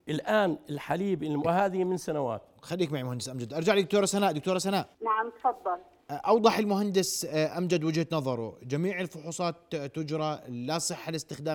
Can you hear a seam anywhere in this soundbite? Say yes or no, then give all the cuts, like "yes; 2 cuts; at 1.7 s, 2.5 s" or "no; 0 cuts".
yes; 2 cuts; at 1.4 s, 4.9 s